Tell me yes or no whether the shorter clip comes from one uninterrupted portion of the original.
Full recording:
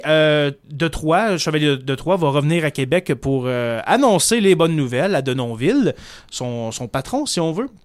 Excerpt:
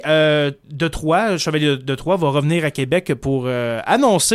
yes